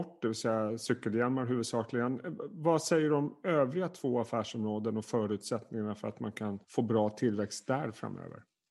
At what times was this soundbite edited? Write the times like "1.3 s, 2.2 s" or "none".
6.6 s